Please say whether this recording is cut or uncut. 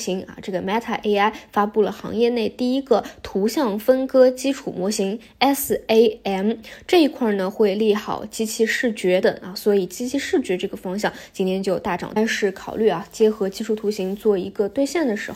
cut